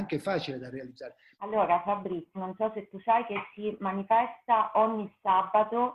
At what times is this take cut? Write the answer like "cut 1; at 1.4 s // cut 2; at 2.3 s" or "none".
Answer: cut 1; at 1.3 s // cut 2; at 2.3 s